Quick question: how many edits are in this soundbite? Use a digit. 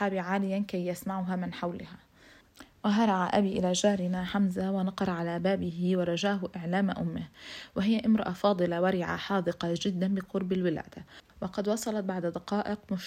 1